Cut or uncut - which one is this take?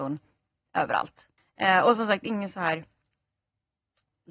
uncut